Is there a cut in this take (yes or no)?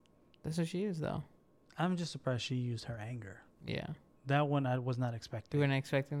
no